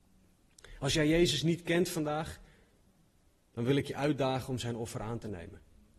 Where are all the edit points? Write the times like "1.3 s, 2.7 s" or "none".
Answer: none